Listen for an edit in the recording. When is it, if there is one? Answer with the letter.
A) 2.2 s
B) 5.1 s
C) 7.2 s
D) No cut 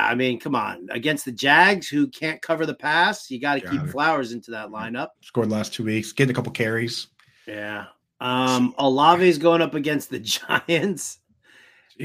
B